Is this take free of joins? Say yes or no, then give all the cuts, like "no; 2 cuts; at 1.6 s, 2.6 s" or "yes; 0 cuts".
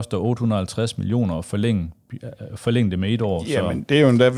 yes; 0 cuts